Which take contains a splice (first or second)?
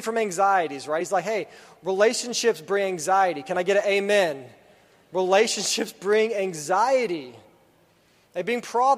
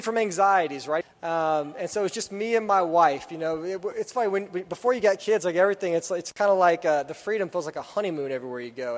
second